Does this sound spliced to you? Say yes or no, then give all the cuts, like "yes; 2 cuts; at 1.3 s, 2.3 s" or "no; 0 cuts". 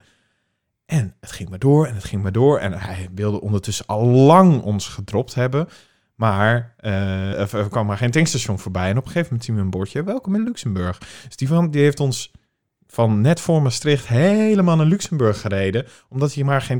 yes; 1 cut; at 7.3 s